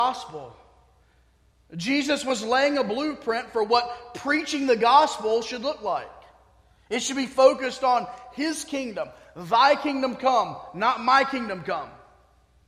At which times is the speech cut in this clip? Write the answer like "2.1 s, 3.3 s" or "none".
none